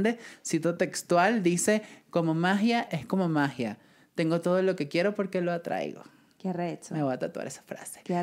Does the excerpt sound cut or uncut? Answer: cut